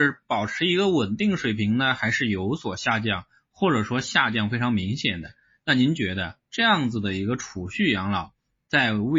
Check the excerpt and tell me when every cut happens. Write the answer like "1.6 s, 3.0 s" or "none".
none